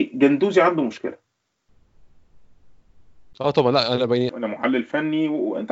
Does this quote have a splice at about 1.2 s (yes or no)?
no